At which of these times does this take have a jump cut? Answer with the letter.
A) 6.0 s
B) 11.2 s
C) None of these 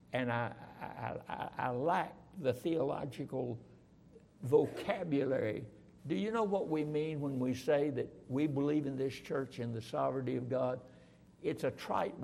A